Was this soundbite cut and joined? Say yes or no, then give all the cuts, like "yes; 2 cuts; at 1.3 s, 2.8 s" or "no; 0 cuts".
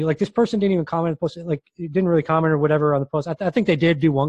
no; 0 cuts